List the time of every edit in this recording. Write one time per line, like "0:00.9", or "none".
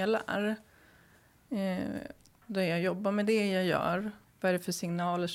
0:04.2